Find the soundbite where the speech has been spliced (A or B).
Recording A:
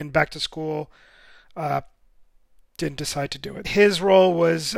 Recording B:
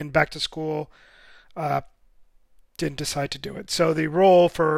A